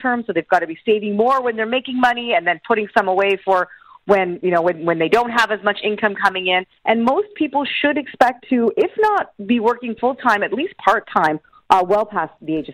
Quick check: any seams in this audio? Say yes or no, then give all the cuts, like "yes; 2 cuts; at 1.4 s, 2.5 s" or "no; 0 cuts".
yes; 1 cut; at 6.8 s